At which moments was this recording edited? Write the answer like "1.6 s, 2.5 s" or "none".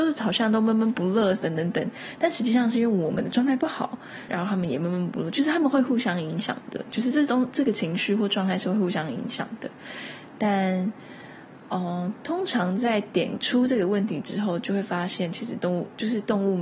4.3 s